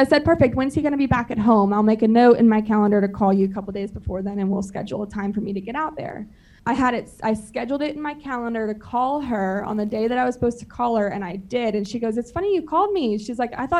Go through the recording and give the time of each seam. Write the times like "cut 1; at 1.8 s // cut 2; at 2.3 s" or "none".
cut 1; at 6.6 s